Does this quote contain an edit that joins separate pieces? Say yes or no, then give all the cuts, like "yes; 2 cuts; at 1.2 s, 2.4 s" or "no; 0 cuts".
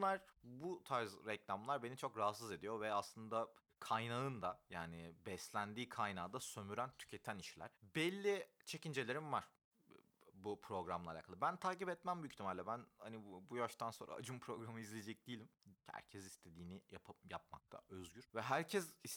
yes; 2 cuts; at 7.8 s, 15.8 s